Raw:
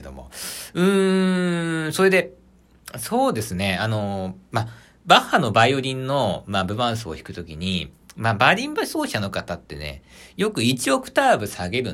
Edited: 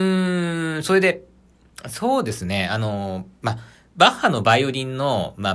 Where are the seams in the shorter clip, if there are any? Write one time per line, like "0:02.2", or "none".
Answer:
none